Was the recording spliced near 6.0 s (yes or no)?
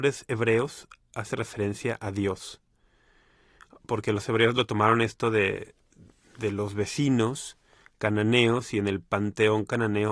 no